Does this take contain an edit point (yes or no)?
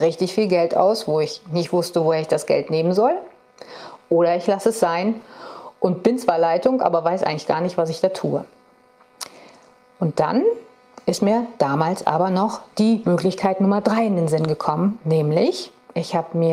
no